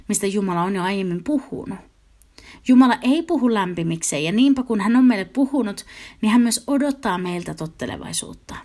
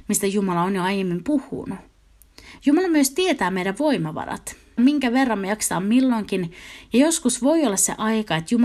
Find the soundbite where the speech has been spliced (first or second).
second